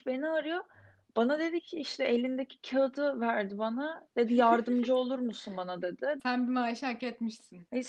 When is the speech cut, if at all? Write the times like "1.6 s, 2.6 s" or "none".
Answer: 6.2 s